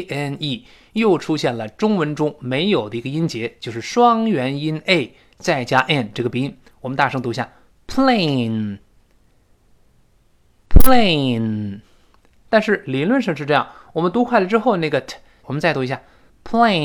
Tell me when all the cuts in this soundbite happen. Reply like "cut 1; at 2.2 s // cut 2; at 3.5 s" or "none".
cut 1; at 12.5 s // cut 2; at 15.4 s